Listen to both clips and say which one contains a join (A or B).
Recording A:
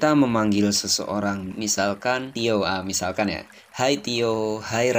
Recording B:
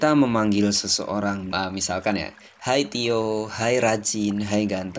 B